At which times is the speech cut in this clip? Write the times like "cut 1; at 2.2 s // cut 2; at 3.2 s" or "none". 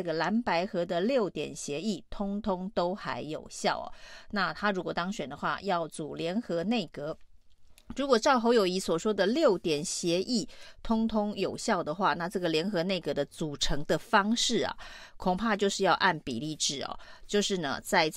none